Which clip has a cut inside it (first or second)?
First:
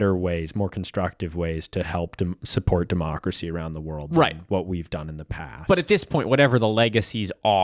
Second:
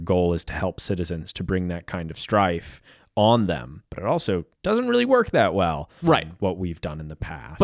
second